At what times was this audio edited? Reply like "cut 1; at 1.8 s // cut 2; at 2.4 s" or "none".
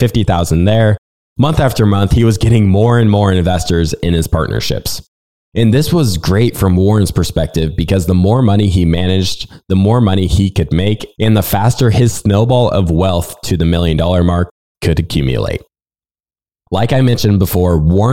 none